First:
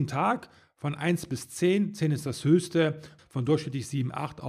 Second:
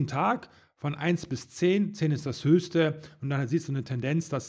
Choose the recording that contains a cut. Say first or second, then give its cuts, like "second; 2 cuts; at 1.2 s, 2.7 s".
first; 1 cut; at 3.2 s